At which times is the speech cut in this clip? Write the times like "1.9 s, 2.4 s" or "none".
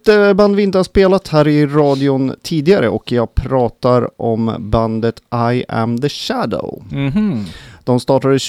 none